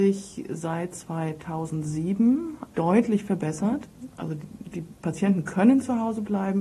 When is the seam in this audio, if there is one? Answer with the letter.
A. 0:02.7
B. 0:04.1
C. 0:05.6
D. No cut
A